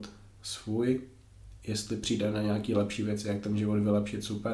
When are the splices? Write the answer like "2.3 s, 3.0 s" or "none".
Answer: none